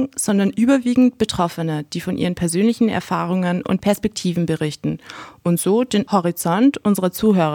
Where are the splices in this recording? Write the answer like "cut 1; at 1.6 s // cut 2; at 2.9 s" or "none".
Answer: none